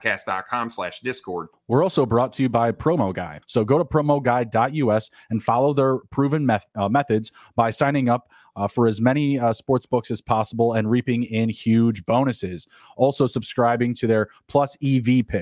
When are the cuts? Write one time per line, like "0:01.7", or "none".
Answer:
0:01.5
0:03.4

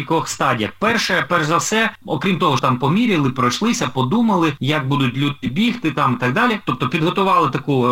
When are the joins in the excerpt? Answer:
0:02.6

